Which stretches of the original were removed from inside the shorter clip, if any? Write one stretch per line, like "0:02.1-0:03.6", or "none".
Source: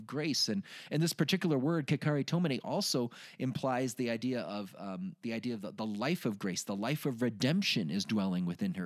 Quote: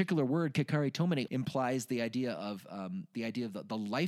0:02.6-0:03.4